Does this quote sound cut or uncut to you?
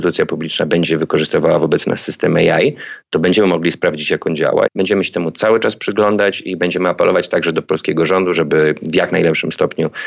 cut